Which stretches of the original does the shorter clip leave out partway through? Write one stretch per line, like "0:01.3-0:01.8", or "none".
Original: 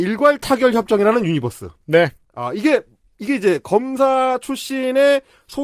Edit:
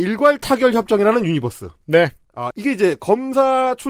0:02.5-0:03.1